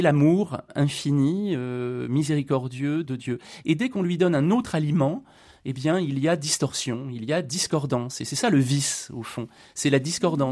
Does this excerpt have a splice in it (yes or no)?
yes